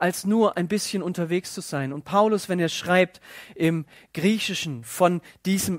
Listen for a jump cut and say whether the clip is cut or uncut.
uncut